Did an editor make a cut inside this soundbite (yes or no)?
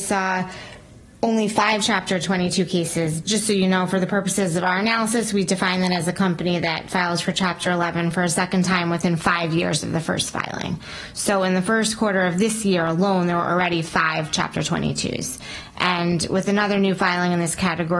yes